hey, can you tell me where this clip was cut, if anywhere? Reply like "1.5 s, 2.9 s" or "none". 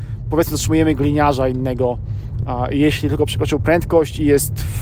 none